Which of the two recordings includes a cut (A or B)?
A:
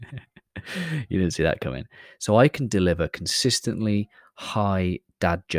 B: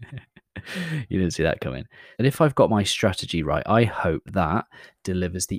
B